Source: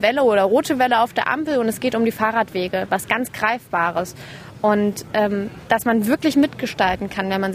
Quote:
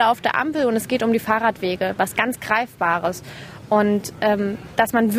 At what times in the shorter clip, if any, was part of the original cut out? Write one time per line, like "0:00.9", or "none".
none